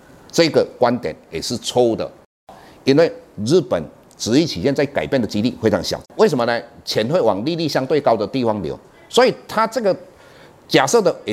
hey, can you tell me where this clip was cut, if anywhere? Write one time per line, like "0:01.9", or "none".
0:06.0